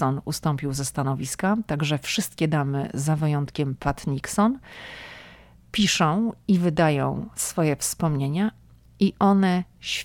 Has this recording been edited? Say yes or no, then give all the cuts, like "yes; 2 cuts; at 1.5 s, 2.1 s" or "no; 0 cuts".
no; 0 cuts